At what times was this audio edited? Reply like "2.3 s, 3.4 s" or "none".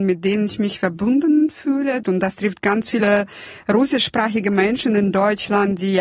2.0 s